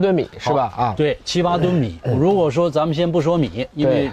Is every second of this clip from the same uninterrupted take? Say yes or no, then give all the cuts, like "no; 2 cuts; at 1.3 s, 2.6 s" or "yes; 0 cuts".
yes; 0 cuts